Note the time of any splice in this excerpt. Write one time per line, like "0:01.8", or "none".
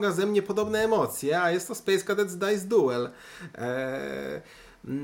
none